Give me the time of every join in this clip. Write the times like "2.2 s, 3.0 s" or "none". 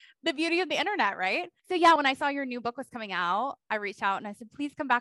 none